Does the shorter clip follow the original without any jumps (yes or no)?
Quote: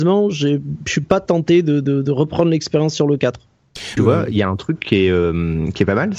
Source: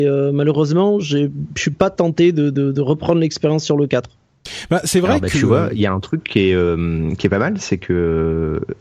no